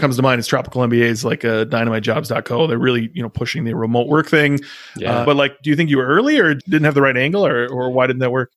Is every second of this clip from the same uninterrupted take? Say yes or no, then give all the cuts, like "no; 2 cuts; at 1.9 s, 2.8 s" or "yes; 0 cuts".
no; 2 cuts; at 5.2 s, 6.6 s